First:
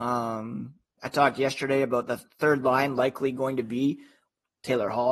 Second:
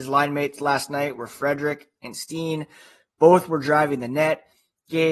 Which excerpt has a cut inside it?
first; 2 cuts; at 1.0 s, 2.3 s

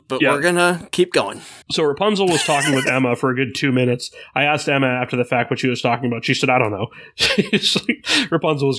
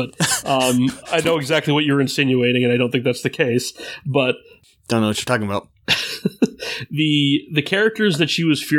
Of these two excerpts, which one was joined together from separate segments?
first; 1 cut; at 1.6 s

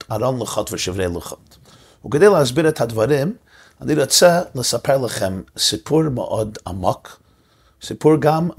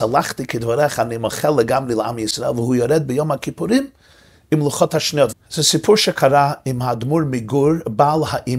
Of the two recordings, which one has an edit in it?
second; 1 cut; at 5.3 s

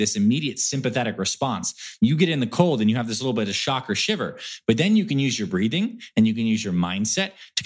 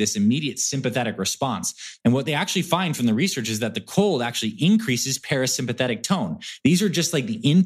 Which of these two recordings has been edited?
second; 2 cuts; at 2.0 s, 6.6 s

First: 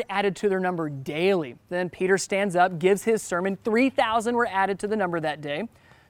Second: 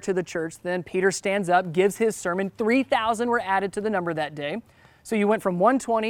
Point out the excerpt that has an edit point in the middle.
first; 1 cut; at 1.7 s

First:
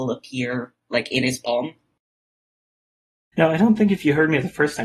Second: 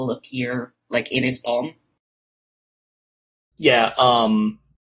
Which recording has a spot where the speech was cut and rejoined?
first; 1 cut; at 3.3 s

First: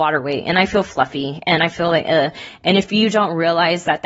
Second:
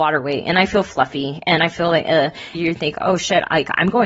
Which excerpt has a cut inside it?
second; 1 cut; at 2.5 s

